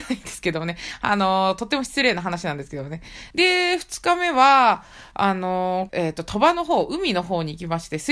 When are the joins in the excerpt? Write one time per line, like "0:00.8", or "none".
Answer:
0:03.3
0:05.9